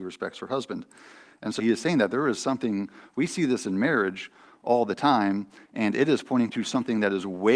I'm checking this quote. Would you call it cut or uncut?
cut